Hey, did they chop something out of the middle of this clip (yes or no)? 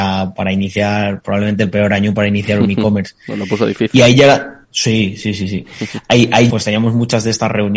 yes